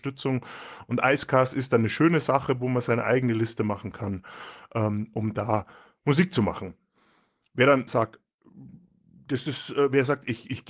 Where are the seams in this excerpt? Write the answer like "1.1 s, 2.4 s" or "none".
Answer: 7.9 s